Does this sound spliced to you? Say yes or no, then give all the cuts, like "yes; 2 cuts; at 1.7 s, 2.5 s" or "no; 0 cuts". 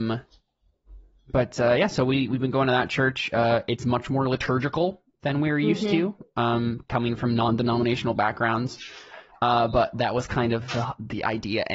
no; 0 cuts